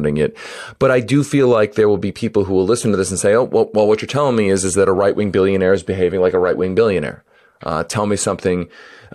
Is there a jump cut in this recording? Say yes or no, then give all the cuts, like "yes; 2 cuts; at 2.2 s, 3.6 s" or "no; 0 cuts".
no; 0 cuts